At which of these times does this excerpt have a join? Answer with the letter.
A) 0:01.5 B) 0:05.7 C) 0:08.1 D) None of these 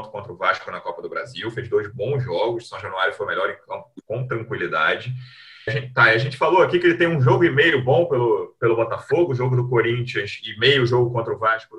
B